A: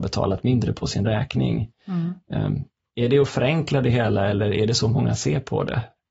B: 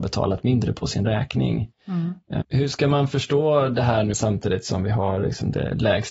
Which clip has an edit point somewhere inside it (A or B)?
B